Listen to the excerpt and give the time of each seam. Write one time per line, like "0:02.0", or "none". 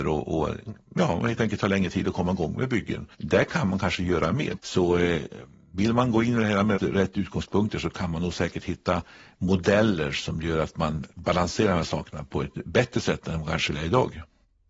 0:03.1
0:04.6
0:06.8